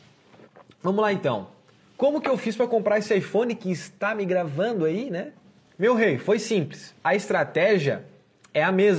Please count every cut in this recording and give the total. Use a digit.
0